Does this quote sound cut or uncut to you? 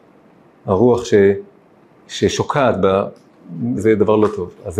cut